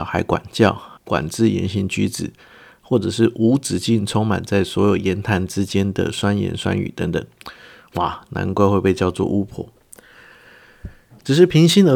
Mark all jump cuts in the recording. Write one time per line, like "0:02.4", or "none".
0:01.0
0:08.3